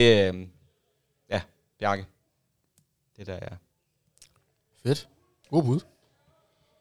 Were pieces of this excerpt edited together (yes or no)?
no